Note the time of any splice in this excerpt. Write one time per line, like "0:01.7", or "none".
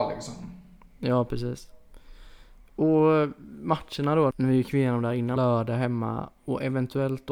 0:04.3
0:05.4